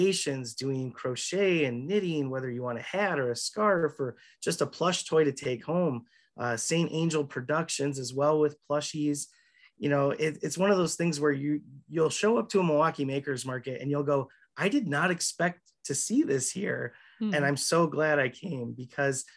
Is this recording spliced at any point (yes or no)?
no